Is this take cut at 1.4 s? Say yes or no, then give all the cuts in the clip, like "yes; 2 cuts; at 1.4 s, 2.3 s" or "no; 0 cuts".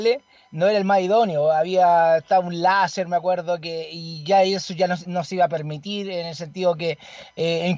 no; 0 cuts